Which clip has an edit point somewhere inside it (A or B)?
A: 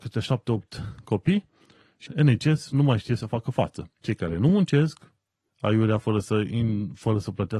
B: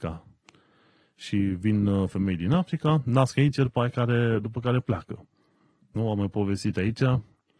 A